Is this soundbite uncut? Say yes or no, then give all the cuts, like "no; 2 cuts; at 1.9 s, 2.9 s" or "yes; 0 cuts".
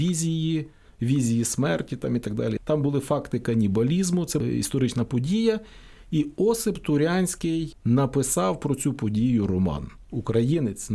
no; 1 cut; at 2.6 s